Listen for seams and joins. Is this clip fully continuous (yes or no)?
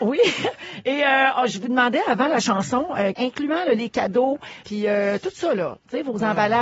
no